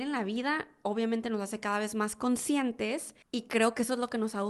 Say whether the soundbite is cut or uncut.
cut